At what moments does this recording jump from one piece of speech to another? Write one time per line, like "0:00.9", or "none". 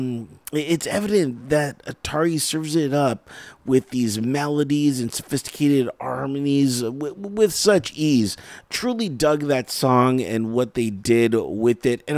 none